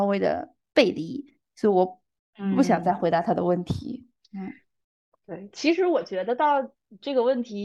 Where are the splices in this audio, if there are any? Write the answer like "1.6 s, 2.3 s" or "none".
none